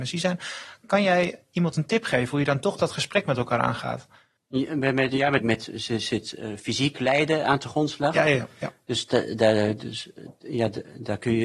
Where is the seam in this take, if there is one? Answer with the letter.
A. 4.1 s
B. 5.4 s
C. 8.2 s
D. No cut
B